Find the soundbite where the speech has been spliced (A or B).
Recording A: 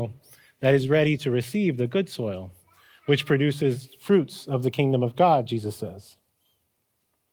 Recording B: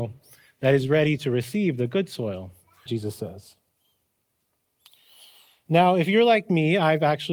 B